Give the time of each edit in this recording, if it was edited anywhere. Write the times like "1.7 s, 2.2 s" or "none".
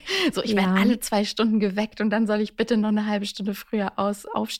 none